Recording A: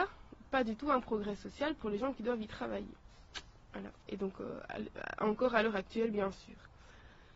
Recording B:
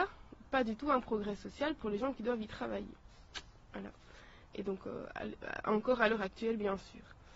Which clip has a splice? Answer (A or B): A